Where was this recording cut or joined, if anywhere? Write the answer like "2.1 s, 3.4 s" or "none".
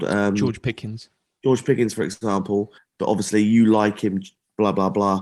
2.8 s